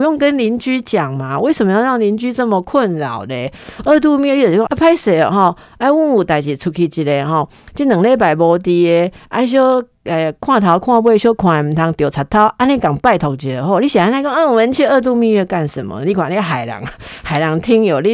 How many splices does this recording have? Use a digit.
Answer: 1